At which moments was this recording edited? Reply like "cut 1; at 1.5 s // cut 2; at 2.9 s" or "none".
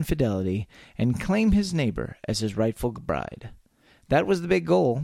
none